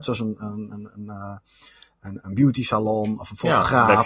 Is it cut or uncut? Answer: uncut